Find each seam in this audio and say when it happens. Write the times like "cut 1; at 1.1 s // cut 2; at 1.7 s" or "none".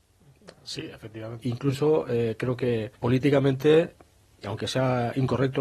cut 1; at 1.4 s // cut 2; at 2.9 s